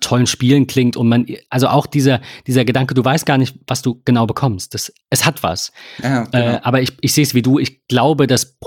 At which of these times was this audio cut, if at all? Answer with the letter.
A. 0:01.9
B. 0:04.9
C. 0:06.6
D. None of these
D